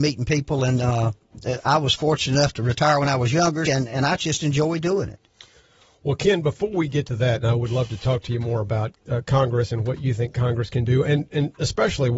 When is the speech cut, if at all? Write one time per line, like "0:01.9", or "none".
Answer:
0:03.7